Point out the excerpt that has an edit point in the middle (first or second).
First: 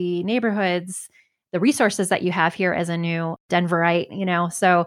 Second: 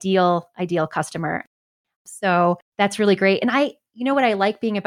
second